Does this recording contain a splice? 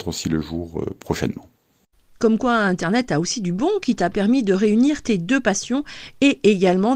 no; 0 cuts

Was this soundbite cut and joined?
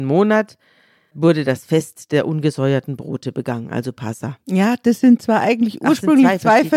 no; 0 cuts

